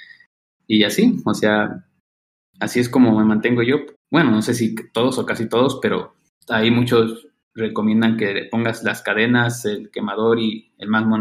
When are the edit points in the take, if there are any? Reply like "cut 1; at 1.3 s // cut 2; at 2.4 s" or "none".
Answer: cut 1; at 3.9 s